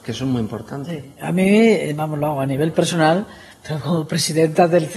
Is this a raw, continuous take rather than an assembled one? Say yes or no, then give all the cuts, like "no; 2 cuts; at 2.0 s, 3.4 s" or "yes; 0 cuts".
yes; 0 cuts